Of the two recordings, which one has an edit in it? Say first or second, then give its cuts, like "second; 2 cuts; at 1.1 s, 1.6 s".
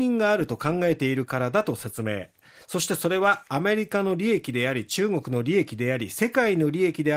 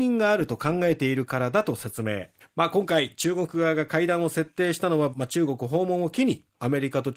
second; 2 cuts; at 2.4 s, 5.1 s